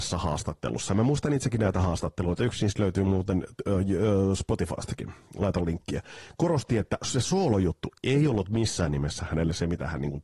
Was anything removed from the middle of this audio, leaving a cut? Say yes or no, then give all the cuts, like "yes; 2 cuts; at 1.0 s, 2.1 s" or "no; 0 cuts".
no; 0 cuts